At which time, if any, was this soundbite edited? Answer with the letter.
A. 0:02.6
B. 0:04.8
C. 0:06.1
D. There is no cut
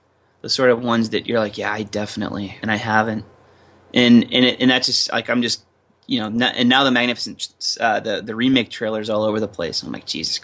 A